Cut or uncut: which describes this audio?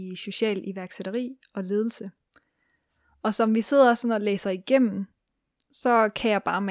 uncut